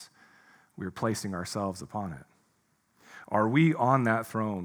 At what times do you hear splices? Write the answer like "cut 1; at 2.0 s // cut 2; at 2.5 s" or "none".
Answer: none